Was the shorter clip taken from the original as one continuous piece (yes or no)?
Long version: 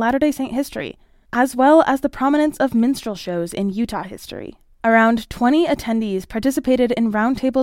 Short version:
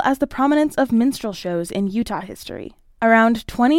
yes